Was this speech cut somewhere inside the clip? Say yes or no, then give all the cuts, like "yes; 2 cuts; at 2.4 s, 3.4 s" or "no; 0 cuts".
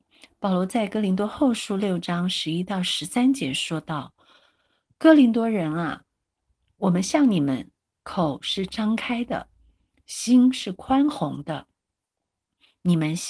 no; 0 cuts